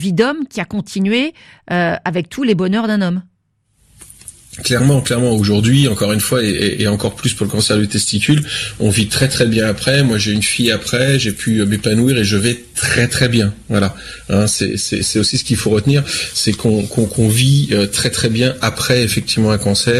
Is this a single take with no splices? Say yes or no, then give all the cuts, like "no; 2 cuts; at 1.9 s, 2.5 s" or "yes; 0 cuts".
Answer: yes; 0 cuts